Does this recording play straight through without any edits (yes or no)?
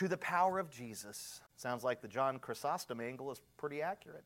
no